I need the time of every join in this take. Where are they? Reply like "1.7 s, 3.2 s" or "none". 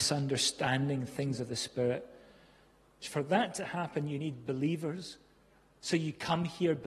3.0 s